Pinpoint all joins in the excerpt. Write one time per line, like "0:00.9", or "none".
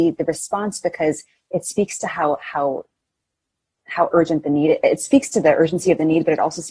none